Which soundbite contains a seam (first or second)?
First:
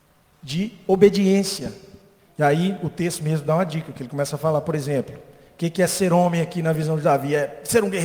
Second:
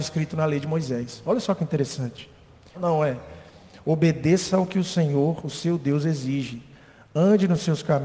second